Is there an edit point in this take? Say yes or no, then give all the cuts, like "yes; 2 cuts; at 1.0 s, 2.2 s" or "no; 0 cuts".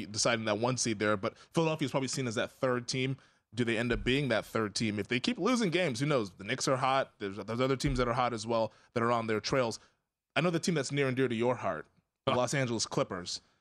no; 0 cuts